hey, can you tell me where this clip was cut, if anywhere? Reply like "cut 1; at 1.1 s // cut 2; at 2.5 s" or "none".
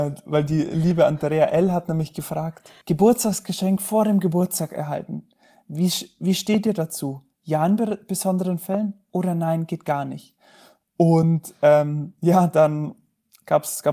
none